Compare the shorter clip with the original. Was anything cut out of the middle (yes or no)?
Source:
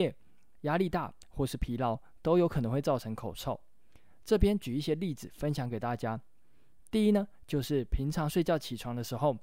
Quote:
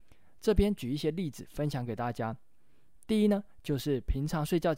no